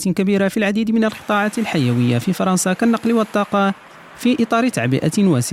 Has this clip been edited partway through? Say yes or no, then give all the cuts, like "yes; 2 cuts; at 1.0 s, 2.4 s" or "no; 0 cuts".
no; 0 cuts